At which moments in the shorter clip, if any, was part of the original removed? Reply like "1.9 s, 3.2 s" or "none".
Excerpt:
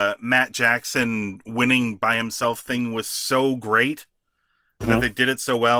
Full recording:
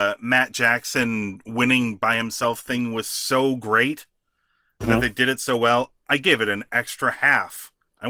none